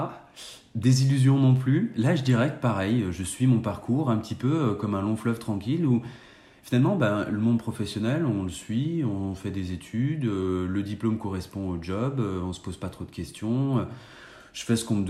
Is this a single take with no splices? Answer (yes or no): yes